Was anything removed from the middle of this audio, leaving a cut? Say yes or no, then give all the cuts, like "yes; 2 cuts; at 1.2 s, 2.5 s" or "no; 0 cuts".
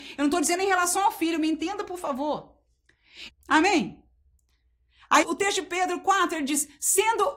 yes; 2 cuts; at 3.3 s, 5.2 s